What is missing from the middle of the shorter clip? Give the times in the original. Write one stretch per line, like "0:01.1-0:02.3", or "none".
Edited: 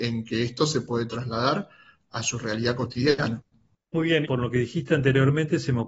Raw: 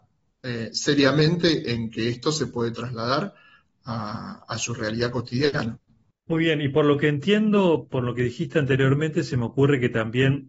0:03.8-0:04.5
0:06.6-0:07.9